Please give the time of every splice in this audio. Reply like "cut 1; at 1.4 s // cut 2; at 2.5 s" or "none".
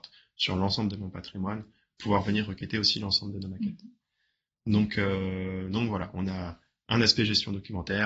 none